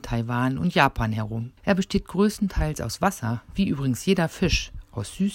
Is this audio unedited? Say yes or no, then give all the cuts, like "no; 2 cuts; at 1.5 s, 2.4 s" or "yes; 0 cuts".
no; 1 cut; at 1.6 s